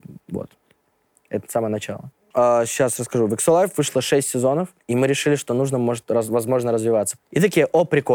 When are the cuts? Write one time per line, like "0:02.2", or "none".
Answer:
0:07.2